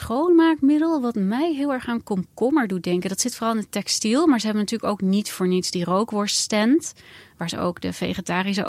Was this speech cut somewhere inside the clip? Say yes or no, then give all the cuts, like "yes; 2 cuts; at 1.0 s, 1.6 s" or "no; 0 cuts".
no; 0 cuts